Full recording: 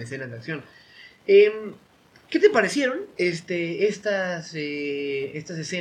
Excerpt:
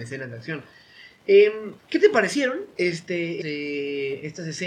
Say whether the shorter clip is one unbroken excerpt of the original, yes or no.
no